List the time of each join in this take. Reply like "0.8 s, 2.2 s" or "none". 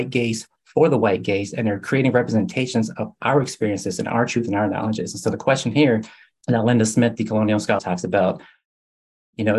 7.8 s